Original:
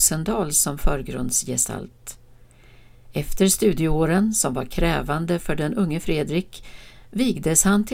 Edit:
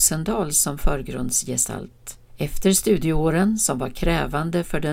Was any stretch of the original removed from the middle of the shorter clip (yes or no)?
yes